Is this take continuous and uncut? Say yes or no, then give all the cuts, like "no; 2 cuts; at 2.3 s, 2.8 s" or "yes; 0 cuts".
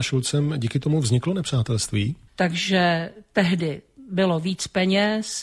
no; 1 cut; at 2.3 s